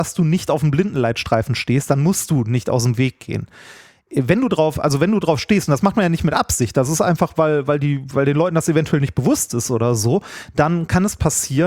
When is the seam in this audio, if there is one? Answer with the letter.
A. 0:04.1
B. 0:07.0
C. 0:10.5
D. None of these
D